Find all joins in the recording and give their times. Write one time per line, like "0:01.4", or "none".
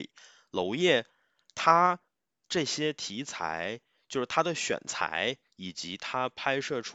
none